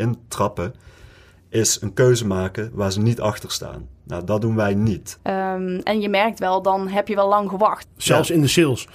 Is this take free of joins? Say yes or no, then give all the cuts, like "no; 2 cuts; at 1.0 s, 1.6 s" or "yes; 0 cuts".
no; 2 cuts; at 5.2 s, 7.8 s